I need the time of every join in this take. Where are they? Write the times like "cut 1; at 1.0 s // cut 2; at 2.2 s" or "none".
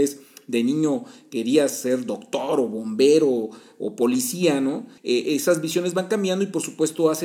cut 1; at 5.0 s

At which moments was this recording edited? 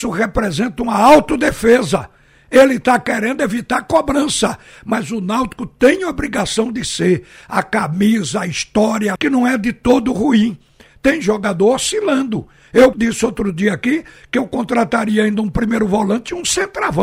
cut 1; at 9.2 s // cut 2; at 12.9 s

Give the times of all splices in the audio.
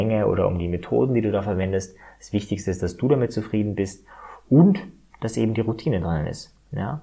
none

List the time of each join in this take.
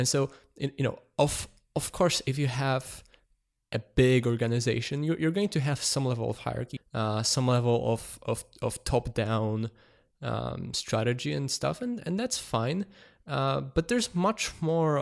cut 1; at 6.8 s

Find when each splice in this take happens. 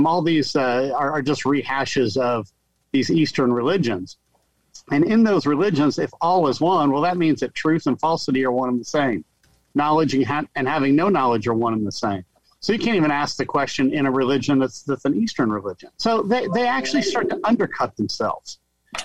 cut 1; at 15.9 s

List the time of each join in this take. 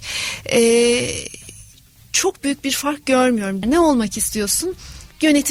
cut 1; at 3.6 s

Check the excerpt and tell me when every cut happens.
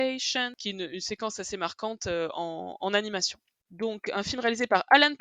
cut 1; at 3.6 s

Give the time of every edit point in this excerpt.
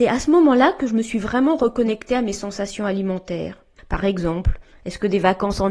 cut 1; at 3.8 s

